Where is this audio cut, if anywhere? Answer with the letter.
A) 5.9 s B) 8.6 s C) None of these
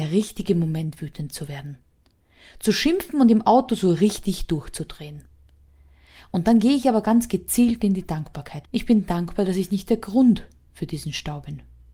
B